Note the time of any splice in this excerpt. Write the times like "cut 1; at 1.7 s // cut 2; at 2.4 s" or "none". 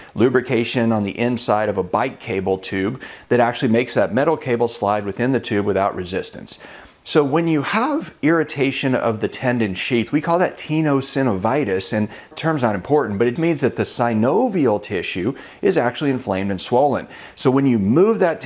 cut 1; at 13.4 s